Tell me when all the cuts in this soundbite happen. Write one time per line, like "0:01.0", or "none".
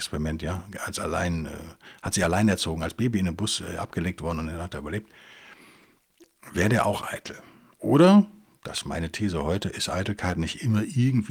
none